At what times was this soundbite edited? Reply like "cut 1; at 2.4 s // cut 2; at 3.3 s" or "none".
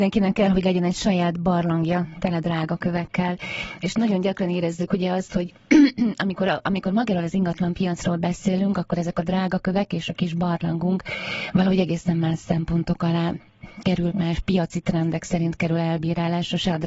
cut 1; at 14.1 s